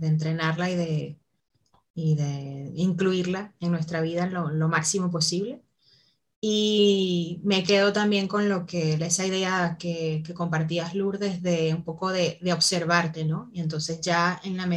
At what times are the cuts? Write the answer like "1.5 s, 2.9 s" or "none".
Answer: none